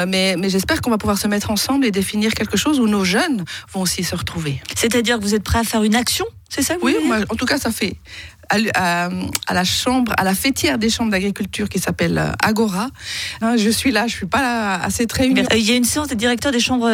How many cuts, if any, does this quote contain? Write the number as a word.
two